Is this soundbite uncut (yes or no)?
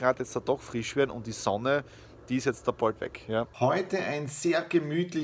no